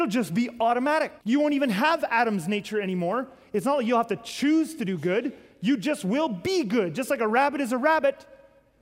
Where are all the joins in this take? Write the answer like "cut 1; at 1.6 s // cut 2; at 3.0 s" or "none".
cut 1; at 1.2 s